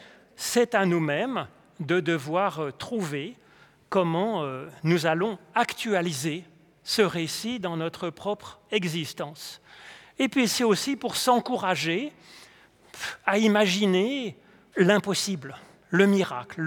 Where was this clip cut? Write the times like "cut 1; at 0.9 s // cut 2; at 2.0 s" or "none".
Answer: cut 1; at 14.7 s